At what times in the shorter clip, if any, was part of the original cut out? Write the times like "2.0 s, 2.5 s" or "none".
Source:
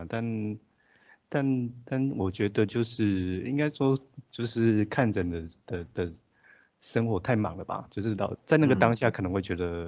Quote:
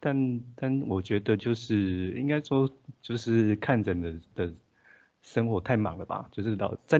4.3 s